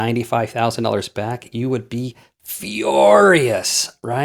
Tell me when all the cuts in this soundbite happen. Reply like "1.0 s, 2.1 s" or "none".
none

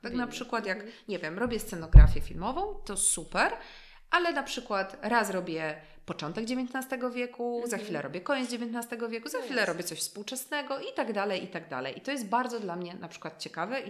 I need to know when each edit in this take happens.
none

